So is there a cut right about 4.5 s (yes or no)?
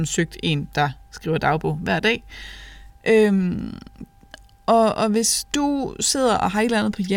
no